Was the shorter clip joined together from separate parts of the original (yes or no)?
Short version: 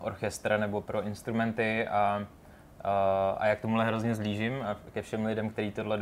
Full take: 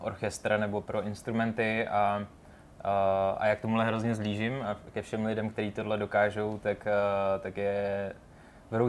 no